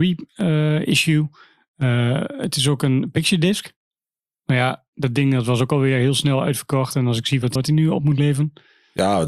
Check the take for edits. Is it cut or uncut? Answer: cut